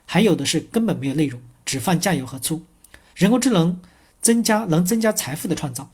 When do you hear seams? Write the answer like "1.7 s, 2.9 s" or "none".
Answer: 3.1 s